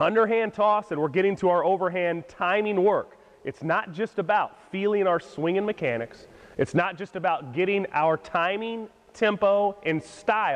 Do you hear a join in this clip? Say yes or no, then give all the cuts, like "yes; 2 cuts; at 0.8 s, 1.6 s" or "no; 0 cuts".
no; 0 cuts